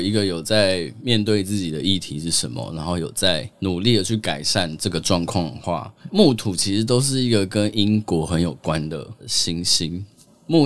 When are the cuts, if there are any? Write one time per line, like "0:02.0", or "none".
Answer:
0:03.5